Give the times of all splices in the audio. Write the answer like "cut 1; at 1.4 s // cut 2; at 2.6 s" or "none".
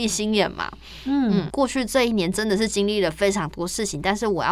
cut 1; at 1.5 s